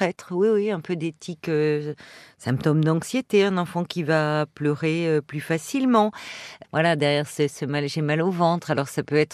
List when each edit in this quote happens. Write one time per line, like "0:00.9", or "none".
0:06.6